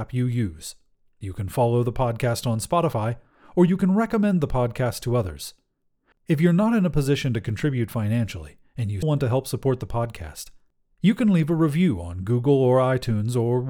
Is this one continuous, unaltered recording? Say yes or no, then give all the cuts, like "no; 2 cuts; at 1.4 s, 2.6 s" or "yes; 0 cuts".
no; 2 cuts; at 6.1 s, 9.0 s